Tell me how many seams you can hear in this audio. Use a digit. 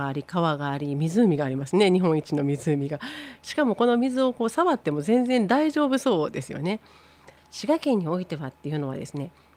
1